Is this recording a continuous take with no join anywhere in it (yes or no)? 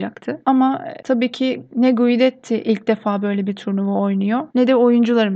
yes